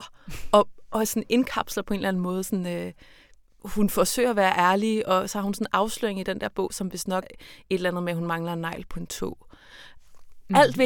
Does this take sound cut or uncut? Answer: cut